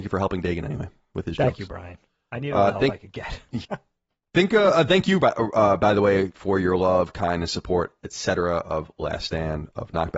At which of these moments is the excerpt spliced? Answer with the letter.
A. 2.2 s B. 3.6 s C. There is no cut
B